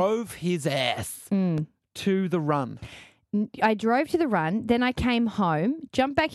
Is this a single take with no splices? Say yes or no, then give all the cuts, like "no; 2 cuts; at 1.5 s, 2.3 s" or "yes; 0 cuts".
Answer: yes; 0 cuts